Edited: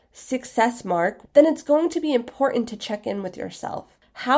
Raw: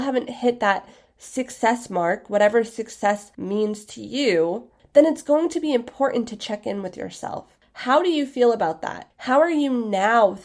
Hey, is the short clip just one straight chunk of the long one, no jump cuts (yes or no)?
no